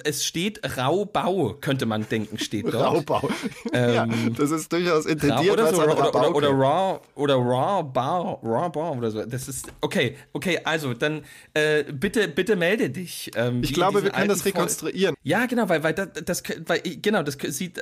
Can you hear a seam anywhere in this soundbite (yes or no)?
yes